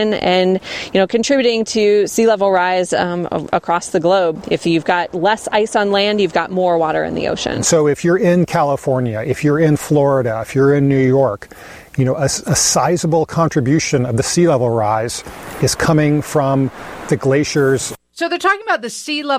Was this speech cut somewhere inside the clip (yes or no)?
no